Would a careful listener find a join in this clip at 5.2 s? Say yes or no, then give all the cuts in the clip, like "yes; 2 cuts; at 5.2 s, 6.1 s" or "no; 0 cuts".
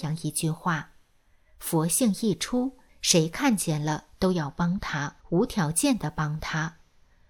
yes; 2 cuts; at 2.9 s, 5.2 s